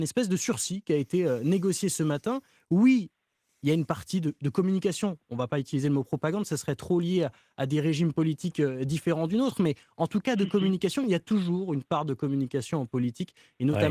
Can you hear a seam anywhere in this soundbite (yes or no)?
no